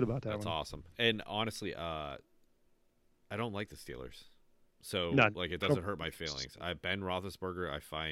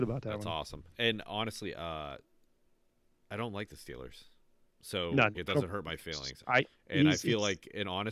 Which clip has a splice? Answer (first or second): second